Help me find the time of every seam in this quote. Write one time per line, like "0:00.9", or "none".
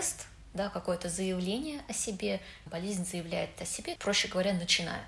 0:02.7
0:04.0